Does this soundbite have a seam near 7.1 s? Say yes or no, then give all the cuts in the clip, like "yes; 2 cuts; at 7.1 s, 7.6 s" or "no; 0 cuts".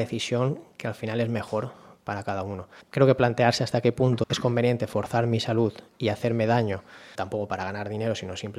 yes; 3 cuts; at 2.8 s, 4.2 s, 7.1 s